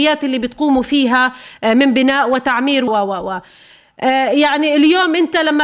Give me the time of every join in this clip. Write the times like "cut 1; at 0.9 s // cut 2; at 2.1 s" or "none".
cut 1; at 2.9 s